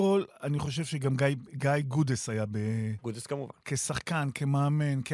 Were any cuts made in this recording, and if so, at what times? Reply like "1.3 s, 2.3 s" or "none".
none

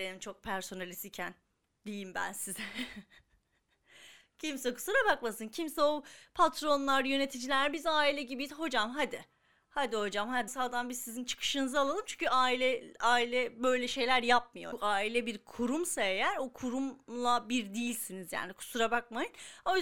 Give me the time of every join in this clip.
10.5 s

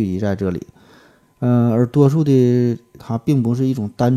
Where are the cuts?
1.2 s, 3.0 s

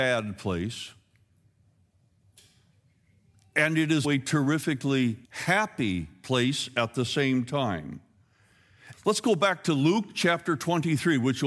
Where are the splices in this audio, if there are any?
4.0 s, 5.2 s, 8.9 s

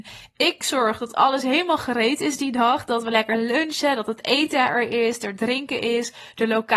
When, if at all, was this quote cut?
none

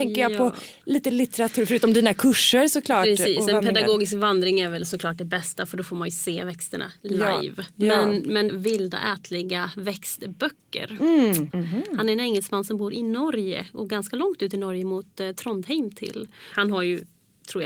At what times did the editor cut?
8.5 s, 11.5 s, 16.5 s

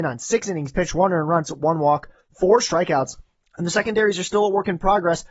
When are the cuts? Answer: 1.4 s

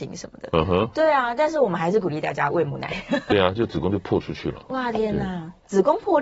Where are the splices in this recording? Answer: 3.3 s

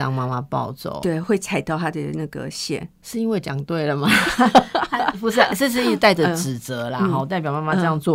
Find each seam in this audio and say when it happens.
1.2 s

